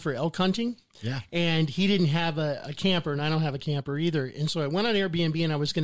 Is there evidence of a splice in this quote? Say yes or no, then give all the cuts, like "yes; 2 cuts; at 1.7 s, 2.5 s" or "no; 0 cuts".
no; 0 cuts